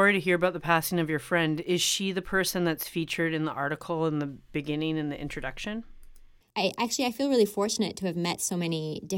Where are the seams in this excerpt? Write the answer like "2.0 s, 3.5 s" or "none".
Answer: 6.4 s